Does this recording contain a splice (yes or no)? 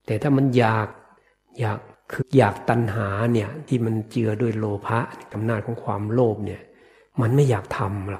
yes